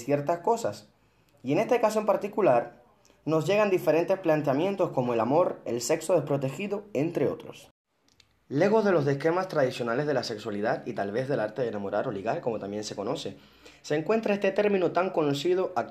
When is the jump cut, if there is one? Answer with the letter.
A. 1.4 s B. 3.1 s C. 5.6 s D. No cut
C